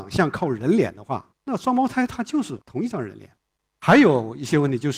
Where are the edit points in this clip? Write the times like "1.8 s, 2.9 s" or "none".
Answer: 1.4 s, 2.6 s